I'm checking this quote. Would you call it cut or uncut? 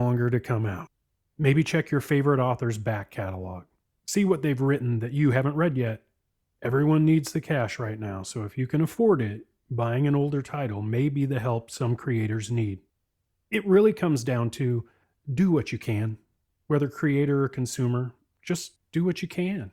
uncut